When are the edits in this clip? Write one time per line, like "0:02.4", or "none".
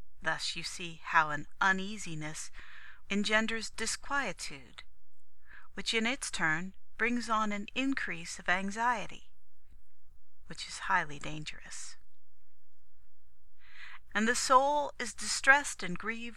0:03.1
0:14.1